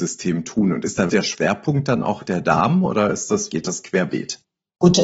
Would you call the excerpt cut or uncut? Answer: cut